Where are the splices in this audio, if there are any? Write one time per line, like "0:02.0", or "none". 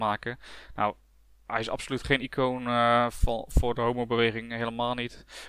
none

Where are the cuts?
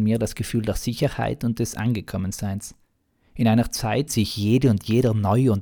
0:04.1

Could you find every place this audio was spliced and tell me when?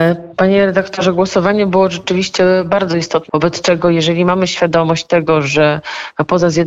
0:03.3

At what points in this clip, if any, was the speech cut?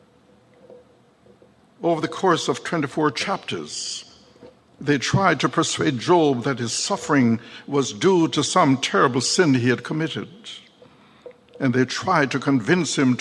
none

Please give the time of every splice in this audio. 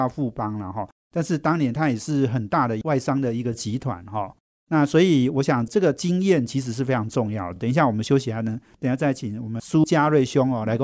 none

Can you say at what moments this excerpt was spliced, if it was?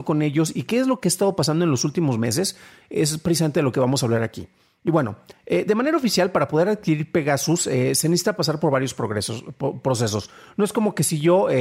none

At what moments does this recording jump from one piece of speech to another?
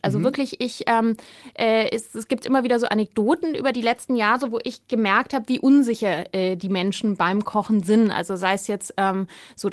none

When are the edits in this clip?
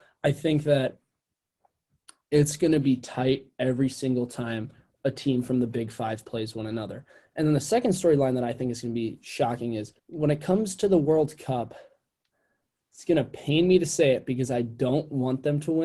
0:10.0

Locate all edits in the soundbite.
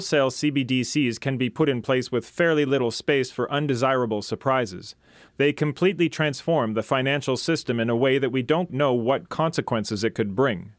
0:05.3
0:08.7

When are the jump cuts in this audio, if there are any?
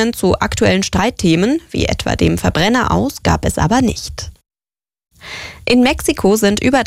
none

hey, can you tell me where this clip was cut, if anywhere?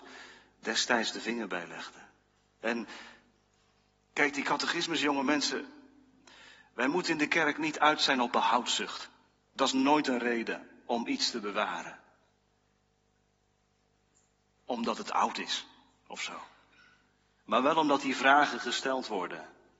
none

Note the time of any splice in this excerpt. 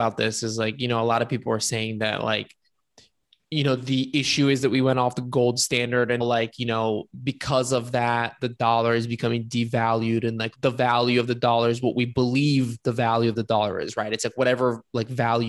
0:06.2
0:10.5

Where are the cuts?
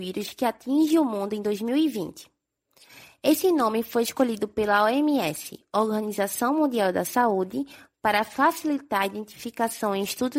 none

